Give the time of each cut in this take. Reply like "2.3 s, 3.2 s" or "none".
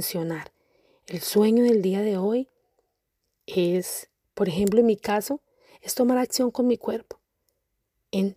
none

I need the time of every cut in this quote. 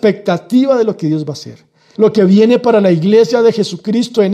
1.9 s

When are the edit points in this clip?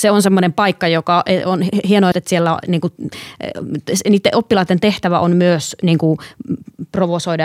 2.1 s

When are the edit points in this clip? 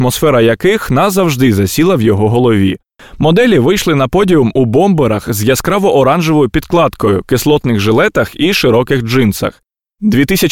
3.0 s

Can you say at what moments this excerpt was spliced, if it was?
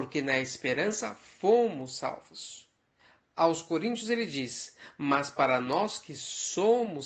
none

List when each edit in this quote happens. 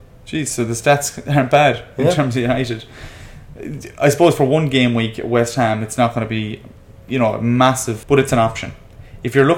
8.0 s

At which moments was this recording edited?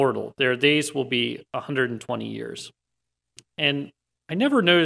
3.4 s

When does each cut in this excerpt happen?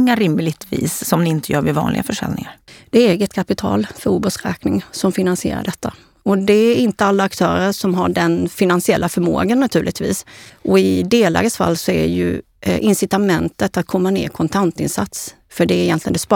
10.5 s

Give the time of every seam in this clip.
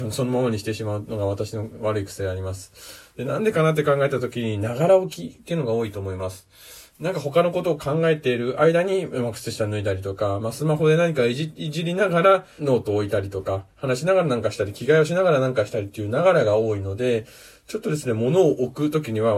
12.6 s

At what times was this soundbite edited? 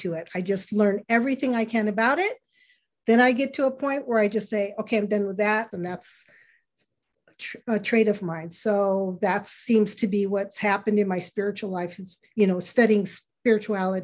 5.7 s

